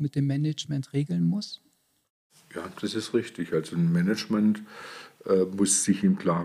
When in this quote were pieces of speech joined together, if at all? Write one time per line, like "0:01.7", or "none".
none